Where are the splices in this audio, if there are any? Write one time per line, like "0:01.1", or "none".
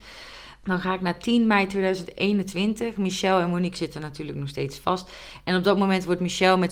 none